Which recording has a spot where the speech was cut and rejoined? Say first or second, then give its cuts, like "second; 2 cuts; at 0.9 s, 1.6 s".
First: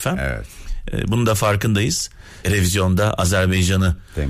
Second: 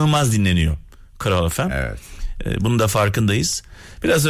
first; 1 cut; at 2.4 s